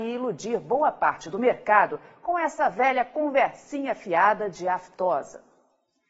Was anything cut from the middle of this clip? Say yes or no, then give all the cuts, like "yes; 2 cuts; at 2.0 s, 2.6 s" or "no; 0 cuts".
no; 0 cuts